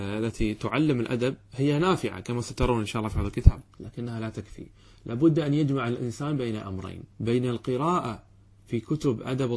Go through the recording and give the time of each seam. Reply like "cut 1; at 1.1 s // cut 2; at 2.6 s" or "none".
cut 1; at 3.7 s // cut 2; at 7.1 s